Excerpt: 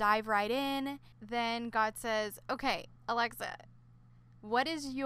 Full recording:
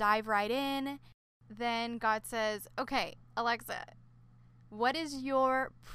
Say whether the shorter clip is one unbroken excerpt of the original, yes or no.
no